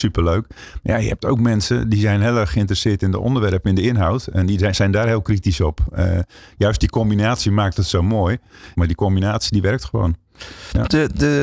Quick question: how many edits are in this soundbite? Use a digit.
1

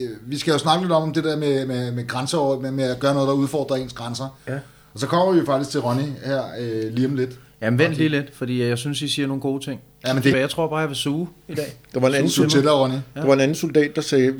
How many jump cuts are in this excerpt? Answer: 1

